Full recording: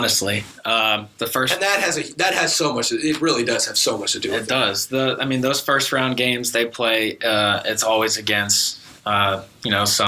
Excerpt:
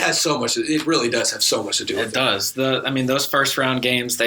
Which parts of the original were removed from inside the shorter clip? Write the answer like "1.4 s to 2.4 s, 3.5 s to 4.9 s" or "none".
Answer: none